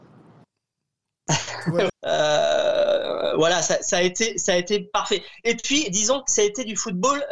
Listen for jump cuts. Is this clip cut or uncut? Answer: cut